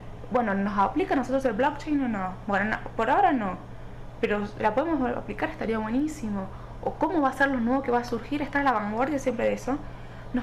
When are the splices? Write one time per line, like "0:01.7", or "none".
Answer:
0:06.8